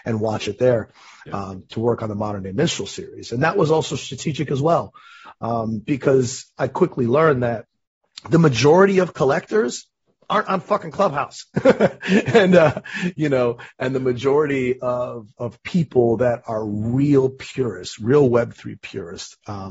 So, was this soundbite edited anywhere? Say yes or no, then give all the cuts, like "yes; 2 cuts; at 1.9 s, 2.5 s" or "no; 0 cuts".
yes; 1 cut; at 1.3 s